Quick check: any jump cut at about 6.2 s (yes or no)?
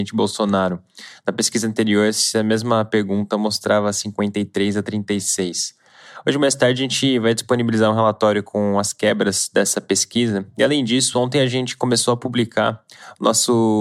no